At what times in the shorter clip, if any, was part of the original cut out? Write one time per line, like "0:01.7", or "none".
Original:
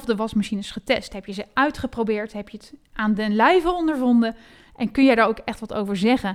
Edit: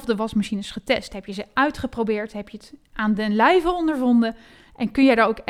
none